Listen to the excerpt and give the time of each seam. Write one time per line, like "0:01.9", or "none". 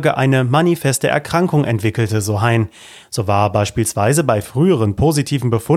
0:03.0